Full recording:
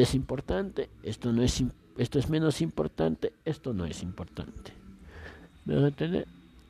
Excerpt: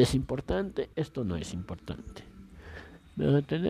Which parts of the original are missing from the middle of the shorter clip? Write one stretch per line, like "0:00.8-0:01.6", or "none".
0:00.9-0:03.4